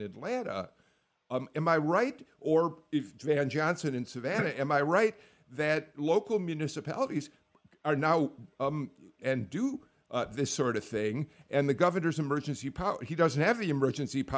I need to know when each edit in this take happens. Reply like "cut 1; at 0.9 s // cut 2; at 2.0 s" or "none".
cut 1; at 9.2 s